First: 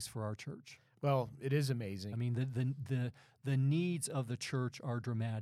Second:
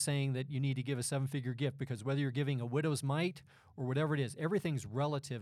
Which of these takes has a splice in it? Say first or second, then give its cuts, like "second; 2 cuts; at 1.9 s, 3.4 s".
first; 1 cut; at 2.1 s